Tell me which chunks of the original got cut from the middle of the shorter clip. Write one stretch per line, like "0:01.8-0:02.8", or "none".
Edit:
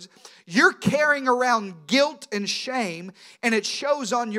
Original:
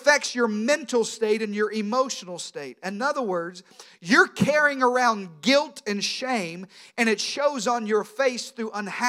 none

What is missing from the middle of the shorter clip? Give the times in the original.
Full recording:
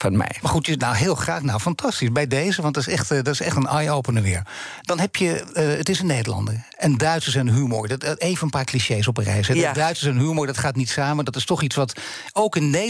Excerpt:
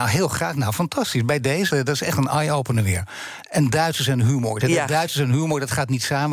0:02.6-0:03.1
0:04.8-0:06.7
0:07.9-0:09.5

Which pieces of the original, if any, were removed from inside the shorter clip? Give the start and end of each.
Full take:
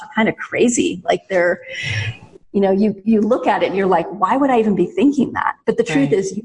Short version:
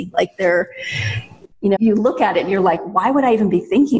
0:02.7-0:03.0

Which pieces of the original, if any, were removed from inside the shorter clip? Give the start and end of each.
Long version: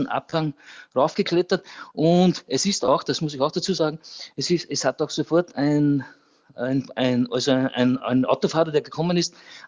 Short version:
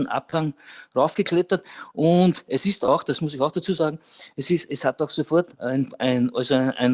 0:05.5-0:06.5

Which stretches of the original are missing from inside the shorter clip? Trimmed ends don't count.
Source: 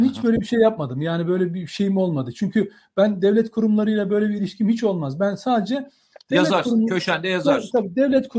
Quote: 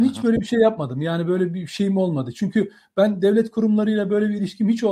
none

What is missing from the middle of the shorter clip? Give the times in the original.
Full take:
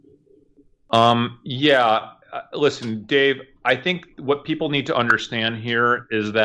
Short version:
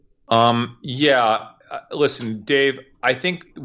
none

